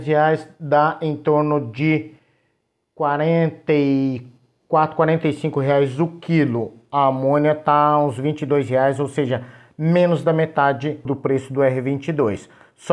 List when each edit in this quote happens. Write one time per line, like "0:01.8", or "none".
0:11.1